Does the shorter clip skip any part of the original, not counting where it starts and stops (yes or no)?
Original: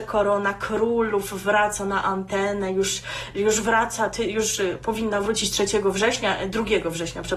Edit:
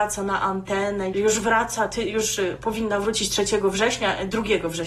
yes